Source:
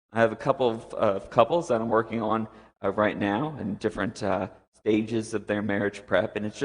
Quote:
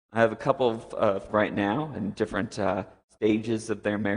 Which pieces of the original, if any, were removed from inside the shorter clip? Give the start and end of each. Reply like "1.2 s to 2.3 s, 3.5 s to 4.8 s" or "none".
1.3 s to 2.9 s